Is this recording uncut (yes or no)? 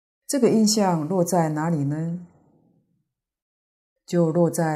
yes